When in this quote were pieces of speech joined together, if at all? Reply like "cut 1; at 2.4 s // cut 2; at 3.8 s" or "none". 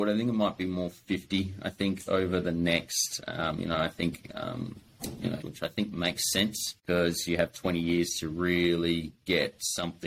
cut 1; at 5.4 s // cut 2; at 6.8 s